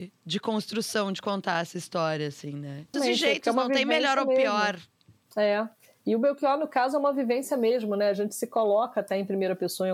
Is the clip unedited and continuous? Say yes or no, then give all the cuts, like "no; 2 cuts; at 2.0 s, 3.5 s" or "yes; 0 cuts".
no; 1 cut; at 2.9 s